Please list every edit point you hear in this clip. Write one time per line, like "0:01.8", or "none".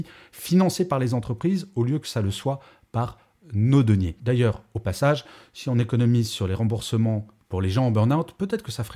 none